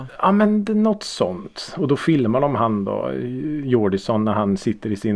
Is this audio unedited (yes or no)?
yes